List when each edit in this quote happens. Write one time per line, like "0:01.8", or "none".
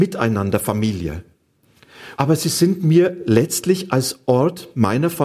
0:02.1